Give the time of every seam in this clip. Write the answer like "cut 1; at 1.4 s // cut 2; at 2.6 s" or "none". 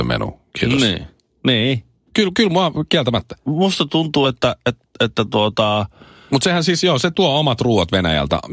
none